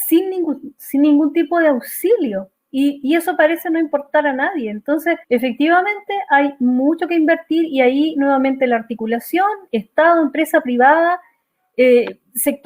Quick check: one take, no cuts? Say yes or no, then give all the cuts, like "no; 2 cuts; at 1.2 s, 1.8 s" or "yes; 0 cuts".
no; 1 cut; at 5.2 s